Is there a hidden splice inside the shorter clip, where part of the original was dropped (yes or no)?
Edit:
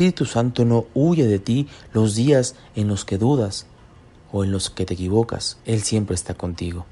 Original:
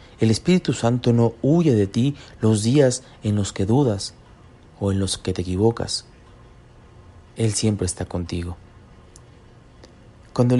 yes